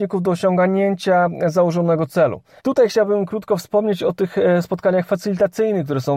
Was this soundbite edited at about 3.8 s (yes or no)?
no